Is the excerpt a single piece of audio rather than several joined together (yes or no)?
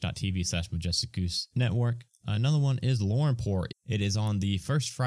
no